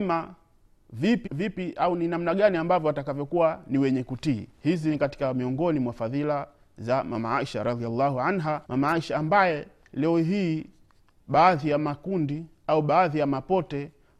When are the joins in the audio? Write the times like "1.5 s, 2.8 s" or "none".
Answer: 1.3 s, 4.5 s, 8.6 s